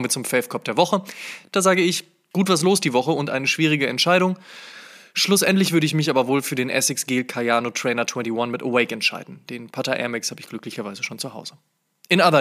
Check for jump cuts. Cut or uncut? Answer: uncut